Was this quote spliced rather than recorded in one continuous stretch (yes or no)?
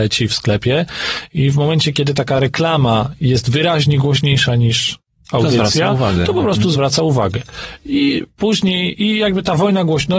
no